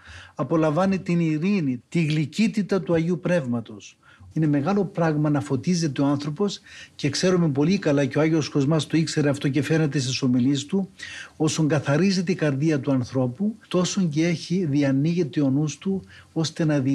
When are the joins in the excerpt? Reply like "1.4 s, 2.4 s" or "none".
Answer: 1.8 s, 4.3 s, 13.6 s